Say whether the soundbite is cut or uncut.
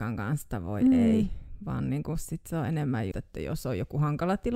cut